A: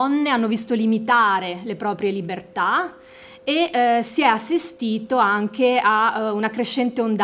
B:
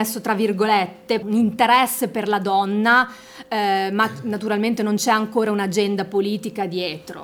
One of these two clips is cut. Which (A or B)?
B